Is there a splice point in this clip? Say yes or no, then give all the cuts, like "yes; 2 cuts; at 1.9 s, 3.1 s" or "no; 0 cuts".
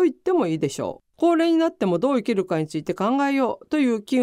yes; 1 cut; at 1.1 s